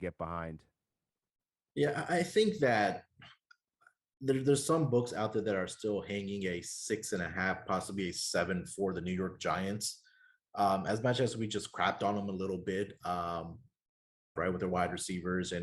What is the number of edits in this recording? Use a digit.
1